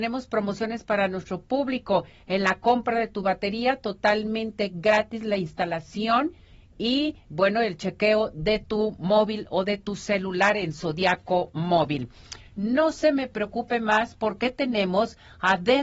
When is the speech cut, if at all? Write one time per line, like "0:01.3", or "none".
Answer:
0:12.4